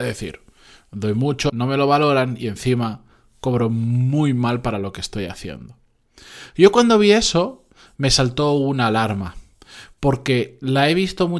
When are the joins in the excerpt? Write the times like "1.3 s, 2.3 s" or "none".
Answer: 1.5 s